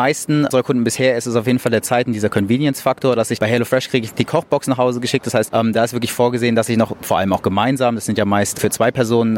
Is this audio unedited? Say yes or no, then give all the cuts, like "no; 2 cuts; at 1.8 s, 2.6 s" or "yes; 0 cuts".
yes; 0 cuts